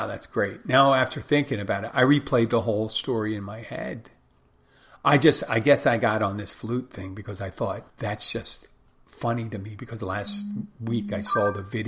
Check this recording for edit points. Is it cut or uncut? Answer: cut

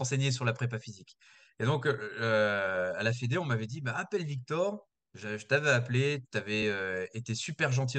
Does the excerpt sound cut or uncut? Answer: uncut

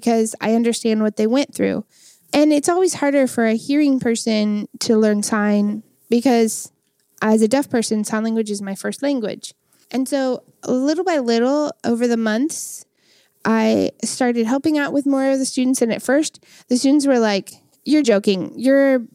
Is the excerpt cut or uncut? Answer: cut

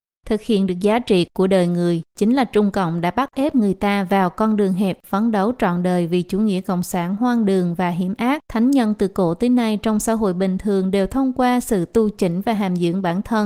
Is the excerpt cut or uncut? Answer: cut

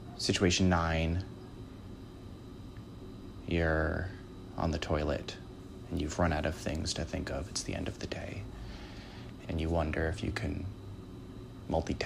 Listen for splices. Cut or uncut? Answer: cut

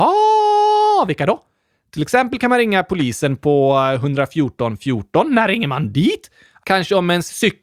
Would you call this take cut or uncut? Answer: uncut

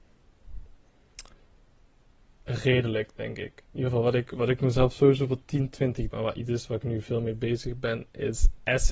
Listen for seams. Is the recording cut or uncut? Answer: cut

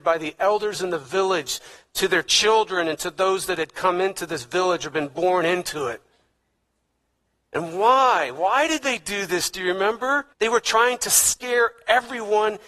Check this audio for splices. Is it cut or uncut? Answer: cut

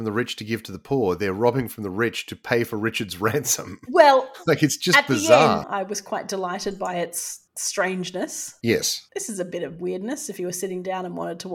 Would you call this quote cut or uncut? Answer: cut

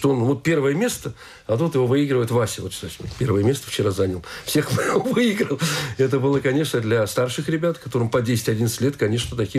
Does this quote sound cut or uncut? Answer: uncut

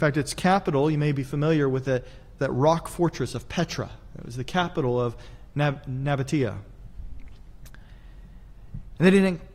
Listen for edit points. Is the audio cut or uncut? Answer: cut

